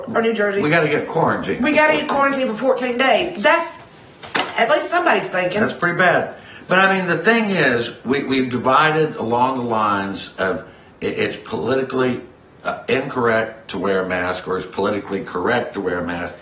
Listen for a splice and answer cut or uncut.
uncut